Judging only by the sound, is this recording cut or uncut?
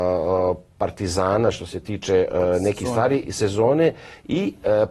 uncut